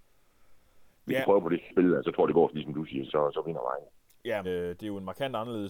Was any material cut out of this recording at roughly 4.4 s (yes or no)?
yes